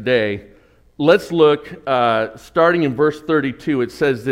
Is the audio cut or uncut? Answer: uncut